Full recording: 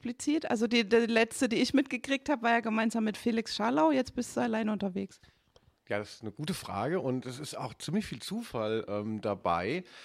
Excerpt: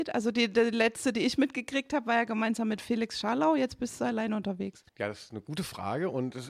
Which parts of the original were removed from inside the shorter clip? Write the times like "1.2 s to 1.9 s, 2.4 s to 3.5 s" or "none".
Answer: 5.2 s to 5.8 s